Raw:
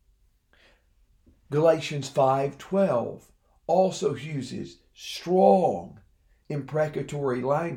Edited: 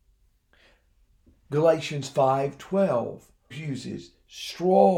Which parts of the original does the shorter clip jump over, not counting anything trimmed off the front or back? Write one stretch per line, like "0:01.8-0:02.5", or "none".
0:03.5-0:04.2